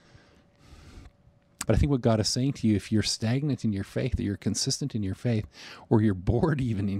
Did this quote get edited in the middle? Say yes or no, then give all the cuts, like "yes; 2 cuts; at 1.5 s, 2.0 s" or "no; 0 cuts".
yes; 1 cut; at 1.6 s